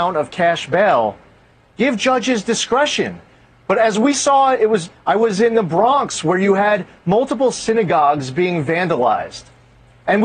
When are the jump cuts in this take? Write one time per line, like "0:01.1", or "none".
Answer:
0:01.6
0:04.9